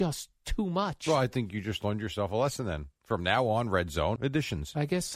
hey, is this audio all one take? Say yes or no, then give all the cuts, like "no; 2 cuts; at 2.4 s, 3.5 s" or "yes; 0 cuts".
no; 1 cut; at 4.2 s